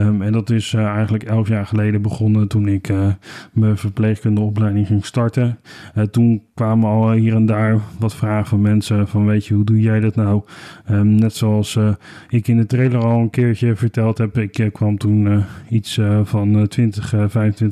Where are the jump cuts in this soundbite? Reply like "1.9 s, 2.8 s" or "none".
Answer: none